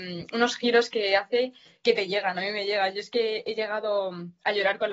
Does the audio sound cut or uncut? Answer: uncut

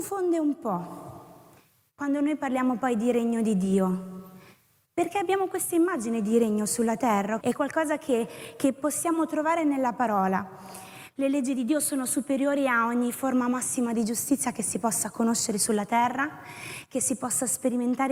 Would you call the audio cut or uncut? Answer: cut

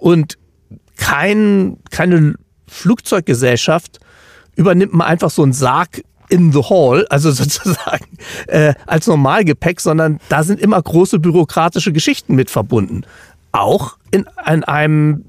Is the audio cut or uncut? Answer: uncut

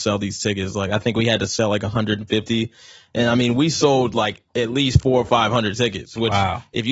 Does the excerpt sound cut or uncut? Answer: uncut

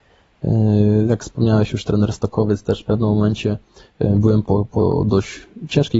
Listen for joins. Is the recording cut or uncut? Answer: cut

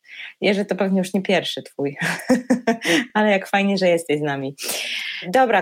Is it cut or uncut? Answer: uncut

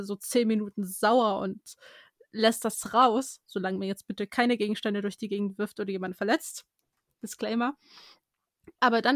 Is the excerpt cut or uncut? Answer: uncut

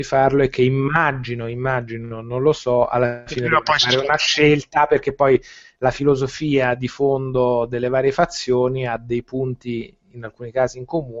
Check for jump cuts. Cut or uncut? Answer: uncut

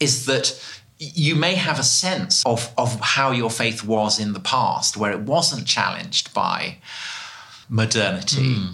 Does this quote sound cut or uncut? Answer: cut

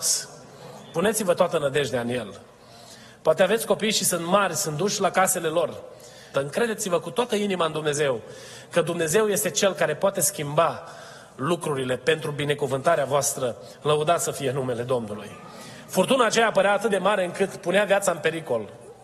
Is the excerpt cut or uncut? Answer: cut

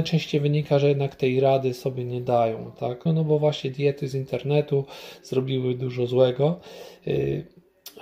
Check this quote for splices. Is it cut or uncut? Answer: cut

